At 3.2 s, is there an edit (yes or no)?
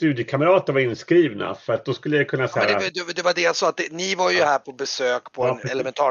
no